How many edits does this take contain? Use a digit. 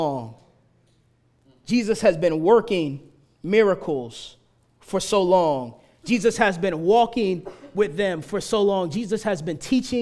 0